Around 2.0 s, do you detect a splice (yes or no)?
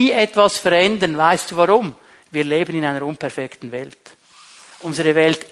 no